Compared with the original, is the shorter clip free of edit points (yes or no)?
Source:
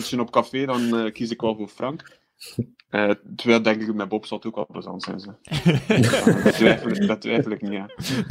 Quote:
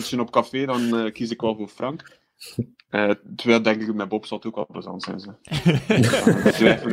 yes